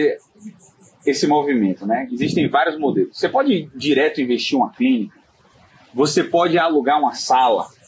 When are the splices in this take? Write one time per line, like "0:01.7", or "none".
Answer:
none